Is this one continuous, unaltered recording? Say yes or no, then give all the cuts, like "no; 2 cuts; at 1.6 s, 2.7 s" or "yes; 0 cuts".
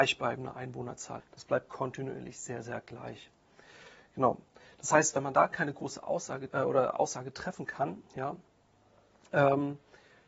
no; 2 cuts; at 1.2 s, 6.5 s